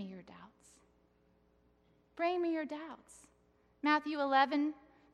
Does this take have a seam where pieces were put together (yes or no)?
no